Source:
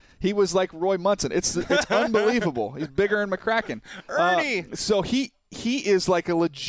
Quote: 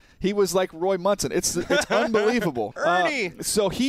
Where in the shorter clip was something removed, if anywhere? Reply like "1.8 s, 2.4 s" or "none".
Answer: 2.7 s

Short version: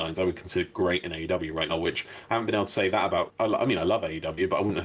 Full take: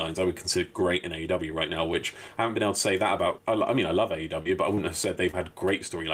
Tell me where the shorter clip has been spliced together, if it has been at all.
1.7 s

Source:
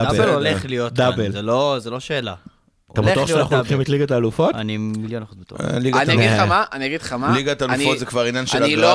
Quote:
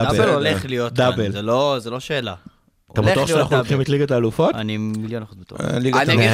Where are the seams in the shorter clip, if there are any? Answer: none

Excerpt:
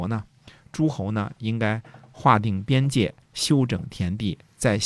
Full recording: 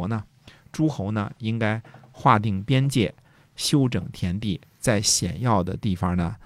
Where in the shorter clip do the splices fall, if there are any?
3.2 s

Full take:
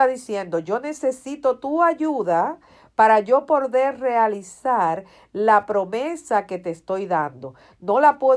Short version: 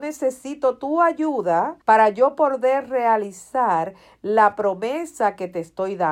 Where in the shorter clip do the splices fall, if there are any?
1.8 s

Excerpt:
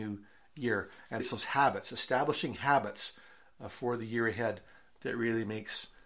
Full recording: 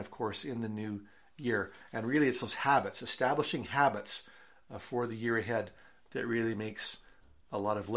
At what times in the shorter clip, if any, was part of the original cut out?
1.2 s

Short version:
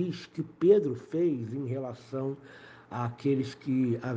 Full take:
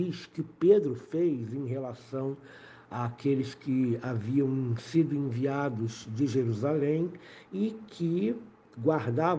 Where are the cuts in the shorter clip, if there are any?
none

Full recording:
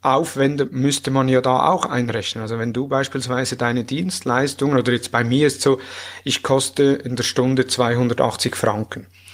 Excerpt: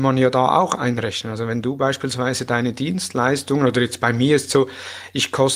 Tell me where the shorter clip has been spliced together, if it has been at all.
none

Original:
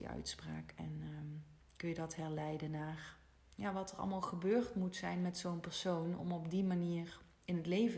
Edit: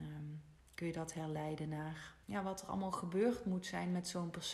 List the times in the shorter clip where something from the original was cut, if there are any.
2.2 s

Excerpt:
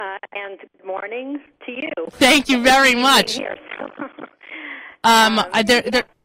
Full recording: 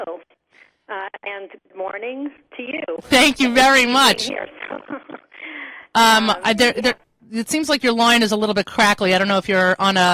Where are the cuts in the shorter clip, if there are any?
none

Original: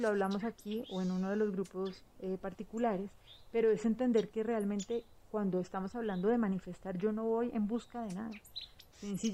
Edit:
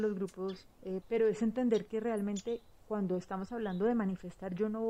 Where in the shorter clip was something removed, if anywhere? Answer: 1.0 s

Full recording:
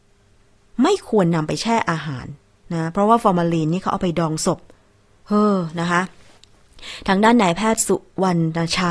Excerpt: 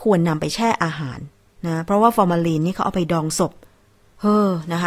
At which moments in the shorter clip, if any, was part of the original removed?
none

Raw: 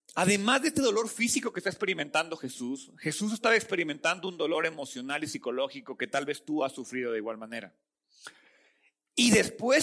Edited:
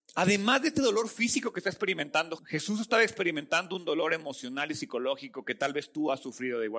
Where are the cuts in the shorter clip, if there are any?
2.4 s

